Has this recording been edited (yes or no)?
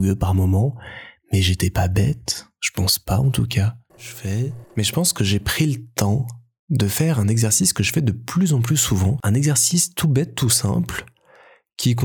yes